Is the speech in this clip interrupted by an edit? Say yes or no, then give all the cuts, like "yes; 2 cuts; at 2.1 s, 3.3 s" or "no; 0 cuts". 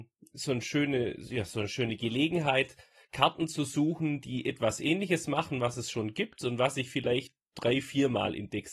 no; 0 cuts